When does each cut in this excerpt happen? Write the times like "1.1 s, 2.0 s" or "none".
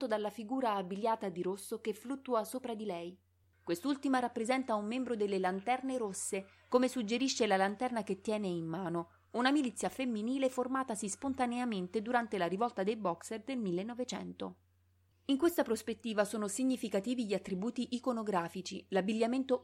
15.1 s